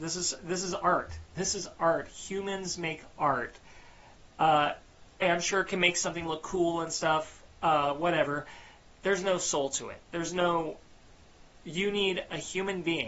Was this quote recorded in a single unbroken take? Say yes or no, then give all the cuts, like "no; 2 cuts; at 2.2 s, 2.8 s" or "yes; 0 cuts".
no; 1 cut; at 5.2 s